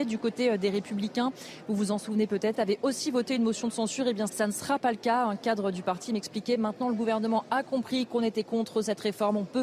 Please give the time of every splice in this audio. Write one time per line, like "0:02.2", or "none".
0:02.5
0:04.3